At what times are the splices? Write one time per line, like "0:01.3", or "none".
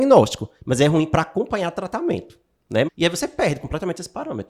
0:02.9

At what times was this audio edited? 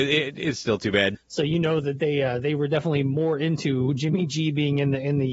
0:01.1

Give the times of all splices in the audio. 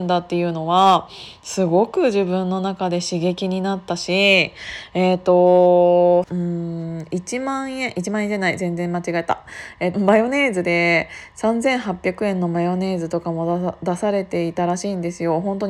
0:06.2
0:09.9

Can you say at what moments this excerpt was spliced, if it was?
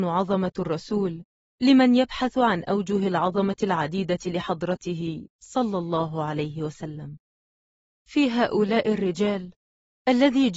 none

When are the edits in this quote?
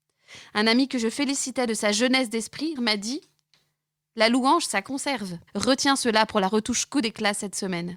0:02.8
0:05.5

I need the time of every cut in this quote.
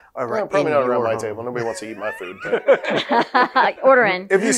none

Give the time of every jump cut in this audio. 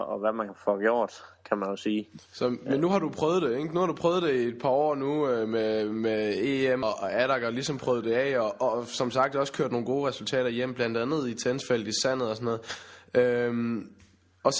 0:06.8

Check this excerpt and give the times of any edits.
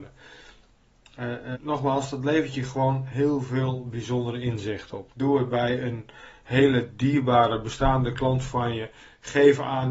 0:01.5
0:05.1

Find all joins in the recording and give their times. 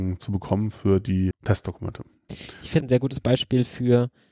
0:01.3
0:02.8

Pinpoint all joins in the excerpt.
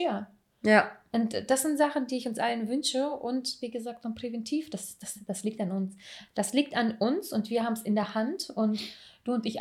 none

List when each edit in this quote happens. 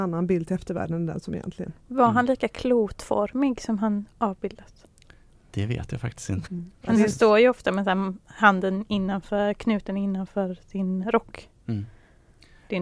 0:06.4
0:11.0

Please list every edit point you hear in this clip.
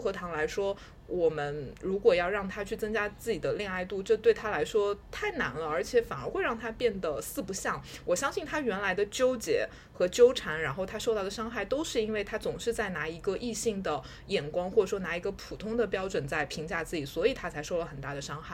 none

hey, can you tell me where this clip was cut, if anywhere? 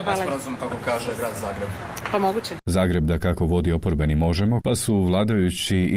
0:02.6
0:04.6

